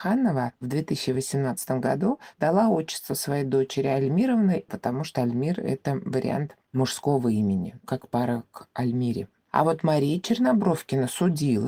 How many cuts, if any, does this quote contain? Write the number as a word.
one